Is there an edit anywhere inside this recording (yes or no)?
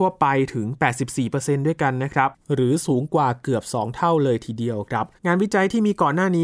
yes